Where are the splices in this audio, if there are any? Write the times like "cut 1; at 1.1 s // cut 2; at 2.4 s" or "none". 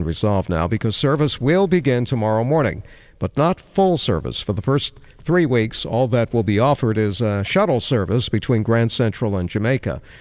none

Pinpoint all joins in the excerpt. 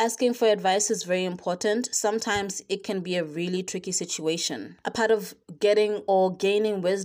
none

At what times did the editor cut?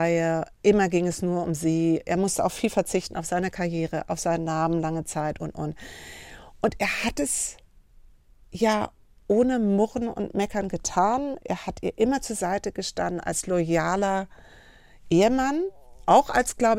cut 1; at 5.4 s

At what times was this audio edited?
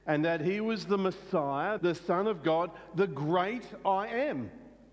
cut 1; at 1.8 s

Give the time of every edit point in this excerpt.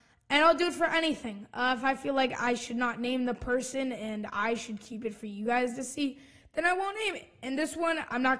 none

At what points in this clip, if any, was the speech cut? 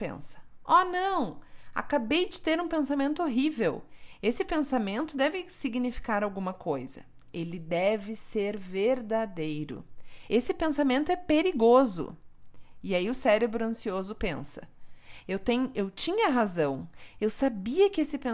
cut 1; at 10.3 s

